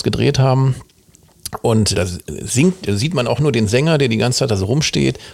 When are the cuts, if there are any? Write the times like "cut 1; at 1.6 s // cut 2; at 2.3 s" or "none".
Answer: cut 1; at 1.9 s